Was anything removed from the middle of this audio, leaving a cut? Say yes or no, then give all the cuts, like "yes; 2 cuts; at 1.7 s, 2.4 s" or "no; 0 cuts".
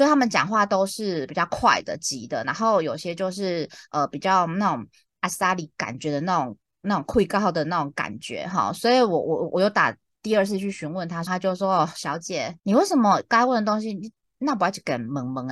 yes; 2 cuts; at 11.3 s, 12.6 s